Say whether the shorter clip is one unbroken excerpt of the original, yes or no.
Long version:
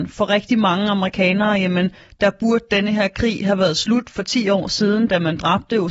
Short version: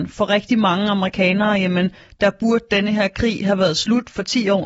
yes